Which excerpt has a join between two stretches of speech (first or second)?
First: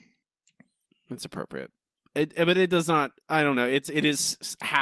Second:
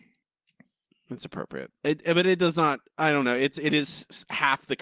second